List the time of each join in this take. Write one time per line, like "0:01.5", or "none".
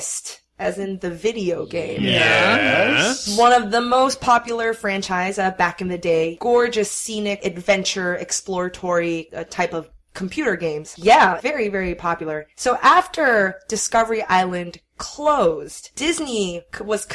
0:11.0